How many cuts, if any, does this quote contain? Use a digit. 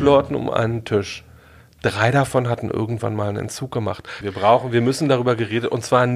1